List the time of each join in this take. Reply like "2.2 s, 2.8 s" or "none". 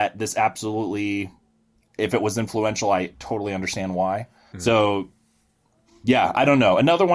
4.5 s